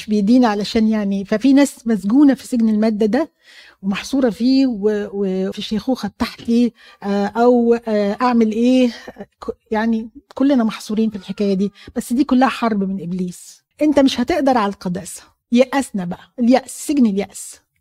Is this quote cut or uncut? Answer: cut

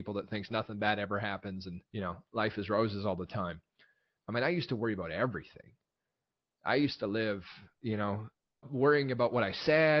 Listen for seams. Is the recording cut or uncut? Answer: cut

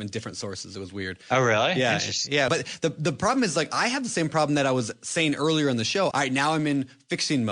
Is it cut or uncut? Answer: cut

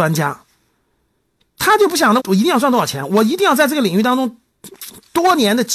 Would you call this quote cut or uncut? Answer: cut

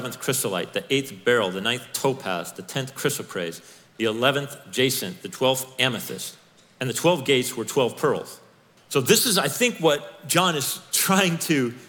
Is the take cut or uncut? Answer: cut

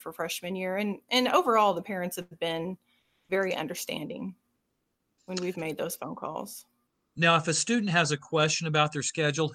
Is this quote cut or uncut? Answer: uncut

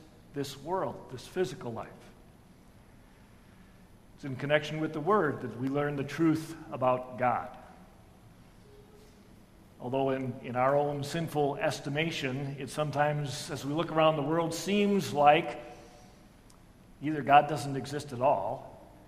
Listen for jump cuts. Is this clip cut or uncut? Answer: uncut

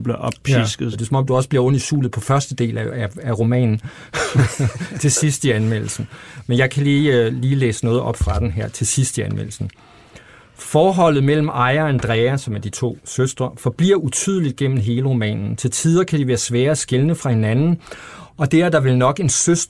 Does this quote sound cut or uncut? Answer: cut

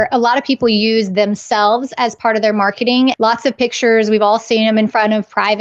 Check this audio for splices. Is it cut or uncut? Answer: cut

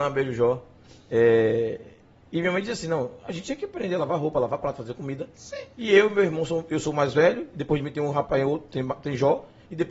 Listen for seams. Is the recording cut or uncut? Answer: uncut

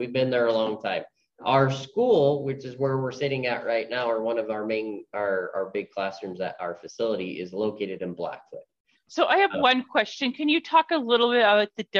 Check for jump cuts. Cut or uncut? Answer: cut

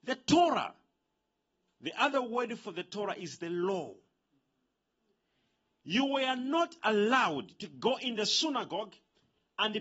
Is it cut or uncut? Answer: uncut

